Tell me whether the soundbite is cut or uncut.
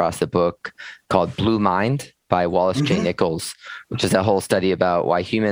uncut